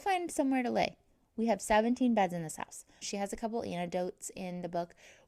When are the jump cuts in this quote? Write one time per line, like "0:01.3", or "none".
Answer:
0:03.0